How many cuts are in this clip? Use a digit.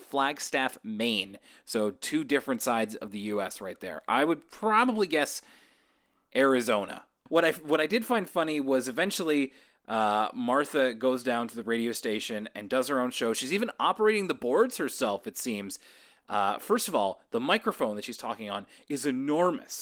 1